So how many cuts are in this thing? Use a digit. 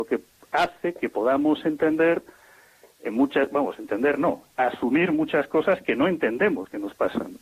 0